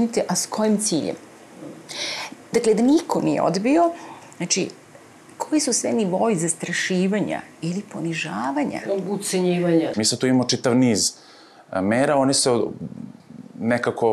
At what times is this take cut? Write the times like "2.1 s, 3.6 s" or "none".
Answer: 9.9 s